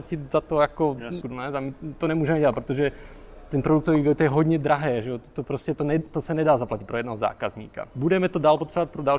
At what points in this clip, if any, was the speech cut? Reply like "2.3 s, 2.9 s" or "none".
1.2 s, 7.9 s